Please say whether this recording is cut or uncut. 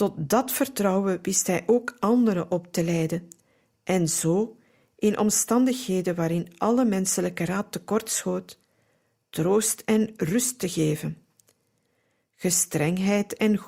uncut